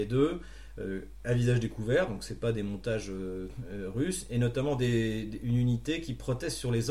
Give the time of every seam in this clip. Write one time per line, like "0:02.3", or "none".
none